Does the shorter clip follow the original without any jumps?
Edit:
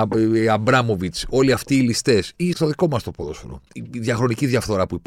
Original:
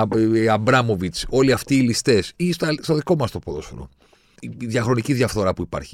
no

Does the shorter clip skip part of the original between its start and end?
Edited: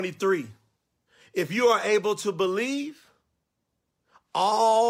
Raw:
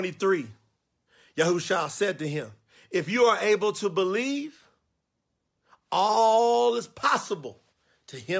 yes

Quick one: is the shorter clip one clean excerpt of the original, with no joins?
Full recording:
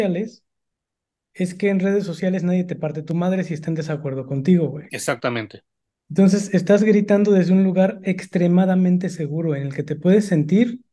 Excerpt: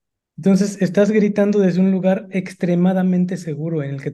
yes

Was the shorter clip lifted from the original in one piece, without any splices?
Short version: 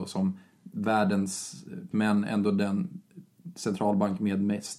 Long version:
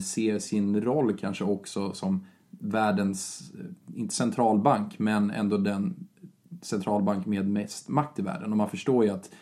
no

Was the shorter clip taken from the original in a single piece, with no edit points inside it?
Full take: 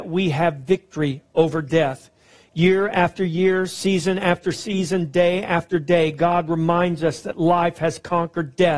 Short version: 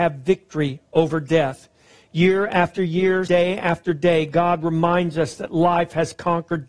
no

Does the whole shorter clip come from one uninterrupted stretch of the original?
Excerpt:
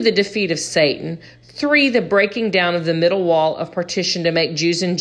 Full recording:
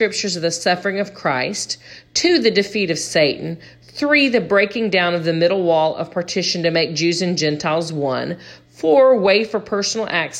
yes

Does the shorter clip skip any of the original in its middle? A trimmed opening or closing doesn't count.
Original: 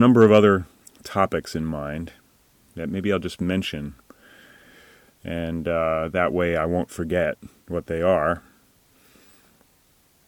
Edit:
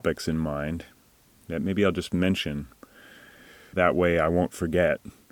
yes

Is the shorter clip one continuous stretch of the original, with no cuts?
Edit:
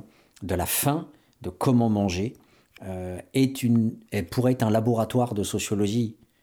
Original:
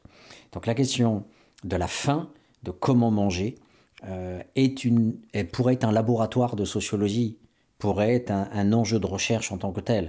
yes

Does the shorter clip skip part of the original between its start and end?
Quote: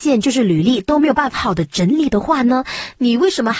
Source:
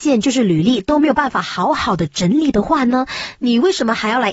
yes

